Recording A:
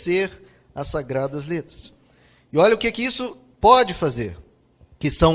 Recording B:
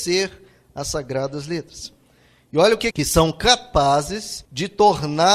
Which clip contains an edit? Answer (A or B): B